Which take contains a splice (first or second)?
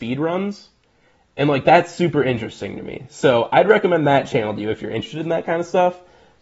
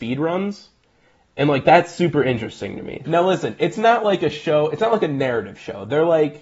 second